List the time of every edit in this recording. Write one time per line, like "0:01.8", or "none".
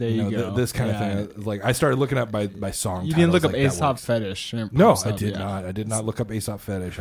none